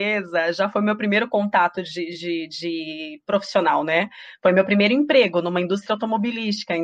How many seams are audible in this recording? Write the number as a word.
zero